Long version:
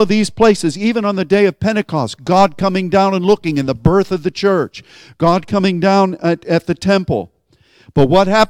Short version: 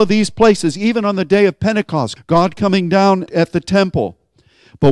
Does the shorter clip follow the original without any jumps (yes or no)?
no